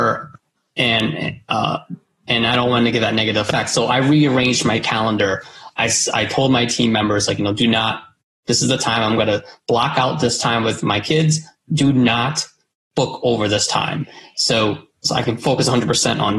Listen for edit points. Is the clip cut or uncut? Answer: uncut